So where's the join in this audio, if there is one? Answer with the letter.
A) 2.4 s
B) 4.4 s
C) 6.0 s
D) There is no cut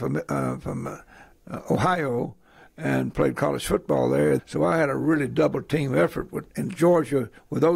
B